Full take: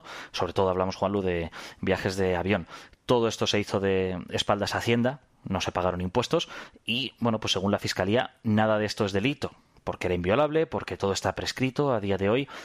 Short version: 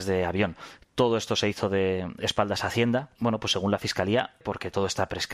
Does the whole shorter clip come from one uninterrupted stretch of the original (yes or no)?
no